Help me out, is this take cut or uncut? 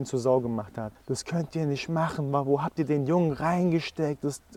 cut